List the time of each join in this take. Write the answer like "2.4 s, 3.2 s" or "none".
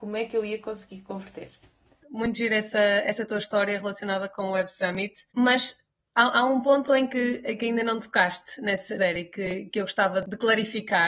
2.0 s, 5.3 s, 9.0 s

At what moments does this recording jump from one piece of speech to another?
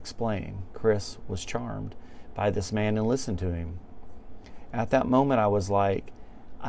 none

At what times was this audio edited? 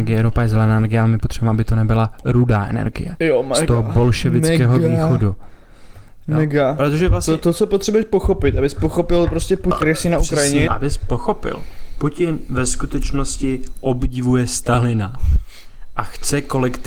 10.7 s

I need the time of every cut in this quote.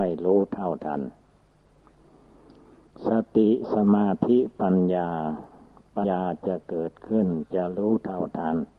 6.0 s

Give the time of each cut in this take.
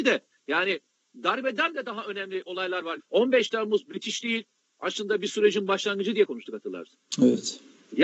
3.0 s

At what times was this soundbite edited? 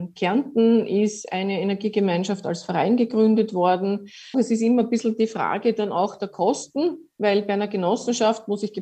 4.3 s, 7.1 s

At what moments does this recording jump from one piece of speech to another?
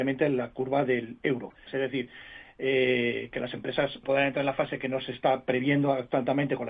1.7 s, 4.0 s

